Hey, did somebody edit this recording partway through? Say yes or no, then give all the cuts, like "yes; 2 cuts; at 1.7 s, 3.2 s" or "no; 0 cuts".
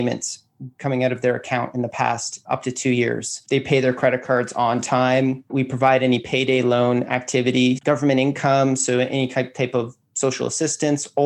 no; 0 cuts